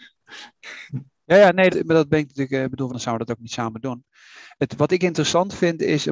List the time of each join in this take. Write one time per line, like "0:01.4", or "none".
0:01.7
0:02.9